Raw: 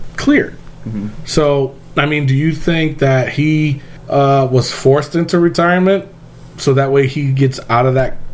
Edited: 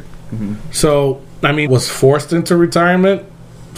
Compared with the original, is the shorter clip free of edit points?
no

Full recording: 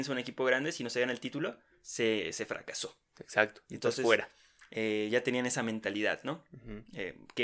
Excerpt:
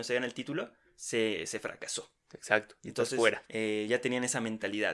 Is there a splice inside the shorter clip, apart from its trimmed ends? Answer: yes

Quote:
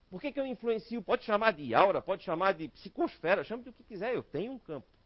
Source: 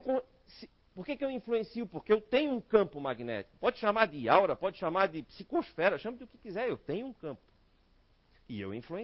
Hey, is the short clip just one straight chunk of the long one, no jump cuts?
no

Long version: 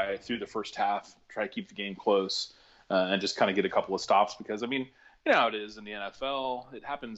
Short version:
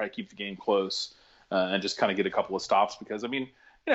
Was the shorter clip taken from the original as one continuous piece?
yes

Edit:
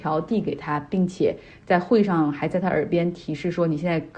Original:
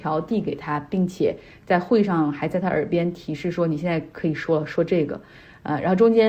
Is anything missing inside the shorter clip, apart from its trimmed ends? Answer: no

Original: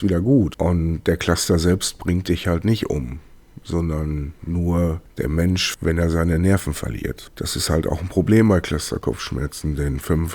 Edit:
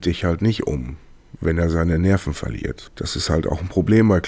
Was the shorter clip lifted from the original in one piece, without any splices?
no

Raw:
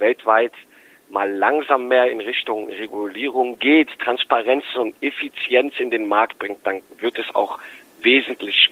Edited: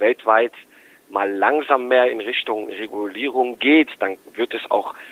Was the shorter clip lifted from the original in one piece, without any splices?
no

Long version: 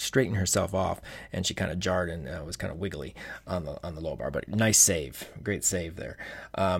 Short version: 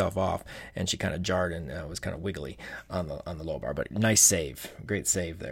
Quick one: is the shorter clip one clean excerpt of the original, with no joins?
yes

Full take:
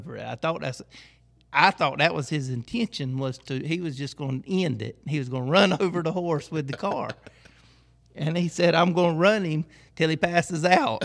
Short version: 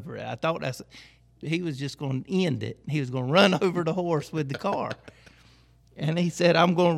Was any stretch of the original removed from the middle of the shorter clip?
yes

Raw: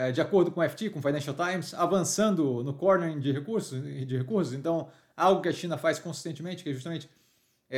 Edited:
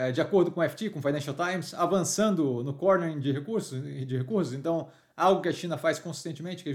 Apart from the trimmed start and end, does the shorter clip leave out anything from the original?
no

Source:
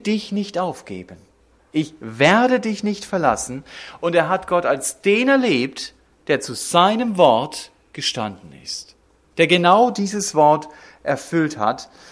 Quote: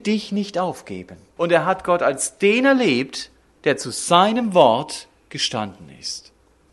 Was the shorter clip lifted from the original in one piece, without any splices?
no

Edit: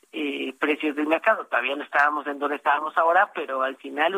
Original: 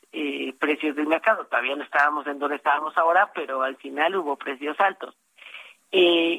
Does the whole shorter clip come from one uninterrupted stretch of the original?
yes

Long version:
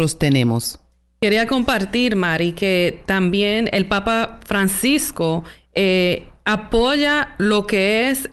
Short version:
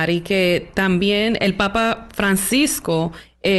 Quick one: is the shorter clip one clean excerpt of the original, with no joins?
yes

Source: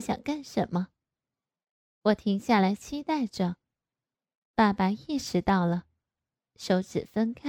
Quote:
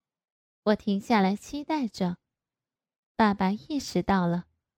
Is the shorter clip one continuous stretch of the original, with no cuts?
yes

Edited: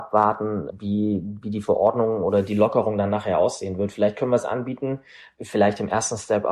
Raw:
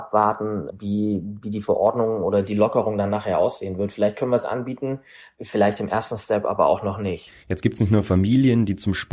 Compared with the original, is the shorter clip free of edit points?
yes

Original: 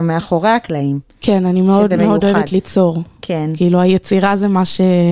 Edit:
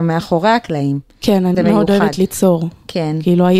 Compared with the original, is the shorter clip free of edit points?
no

